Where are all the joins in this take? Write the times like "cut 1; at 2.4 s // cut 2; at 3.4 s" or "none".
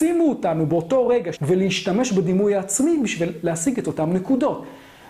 cut 1; at 1.3 s

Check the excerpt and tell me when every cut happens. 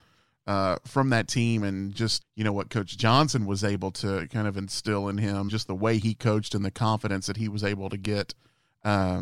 cut 1; at 2.2 s // cut 2; at 5.5 s

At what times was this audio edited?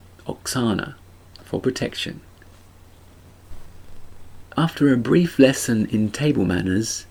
cut 1; at 4.4 s

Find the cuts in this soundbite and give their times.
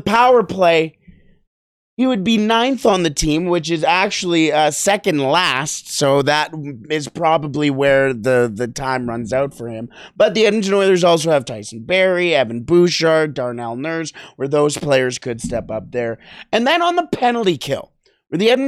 none

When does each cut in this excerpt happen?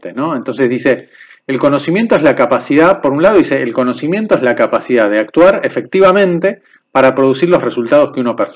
none

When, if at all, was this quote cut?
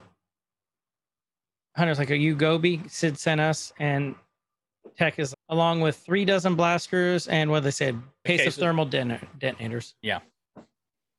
cut 1; at 5.3 s // cut 2; at 8.3 s

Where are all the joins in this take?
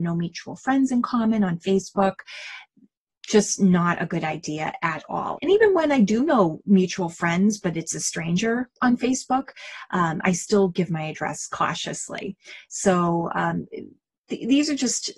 cut 1; at 5.4 s

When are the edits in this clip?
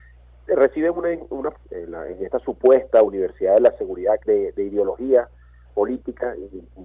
cut 1; at 1.5 s // cut 2; at 4.2 s

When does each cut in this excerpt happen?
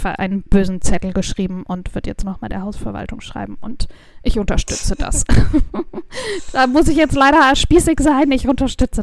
none

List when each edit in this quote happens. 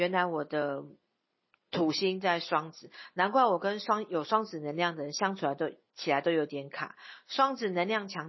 none

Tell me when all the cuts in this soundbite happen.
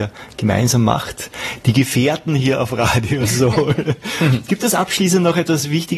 none

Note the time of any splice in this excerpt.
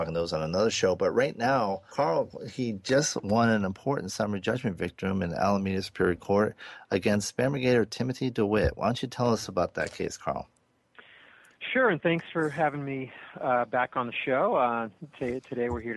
cut 1; at 1.9 s

